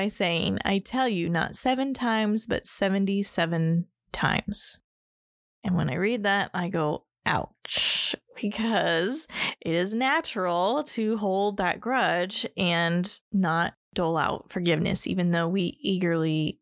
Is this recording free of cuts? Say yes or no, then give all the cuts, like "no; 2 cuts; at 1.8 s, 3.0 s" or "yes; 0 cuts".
yes; 0 cuts